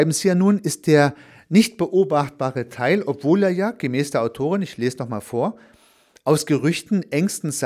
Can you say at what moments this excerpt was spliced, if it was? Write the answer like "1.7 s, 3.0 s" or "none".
none